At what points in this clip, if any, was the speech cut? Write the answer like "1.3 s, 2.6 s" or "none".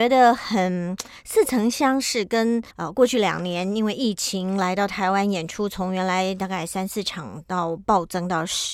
2.7 s